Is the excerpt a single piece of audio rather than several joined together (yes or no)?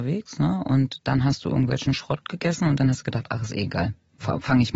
yes